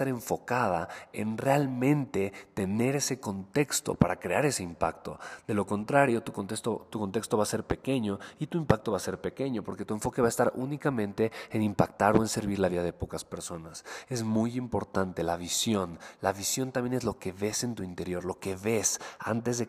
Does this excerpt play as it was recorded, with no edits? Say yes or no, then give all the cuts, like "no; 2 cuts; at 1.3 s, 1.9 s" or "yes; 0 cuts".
yes; 0 cuts